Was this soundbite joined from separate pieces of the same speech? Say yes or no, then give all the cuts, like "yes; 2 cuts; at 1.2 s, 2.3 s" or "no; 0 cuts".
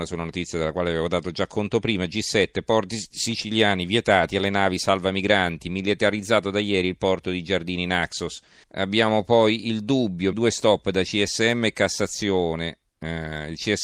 yes; 2 cuts; at 8.6 s, 10.3 s